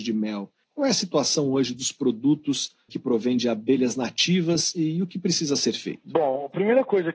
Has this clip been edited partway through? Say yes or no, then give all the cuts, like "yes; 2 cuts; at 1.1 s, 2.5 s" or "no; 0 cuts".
yes; 1 cut; at 2.9 s